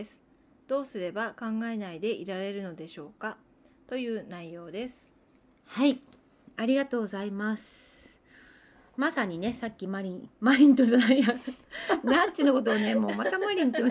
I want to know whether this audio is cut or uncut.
uncut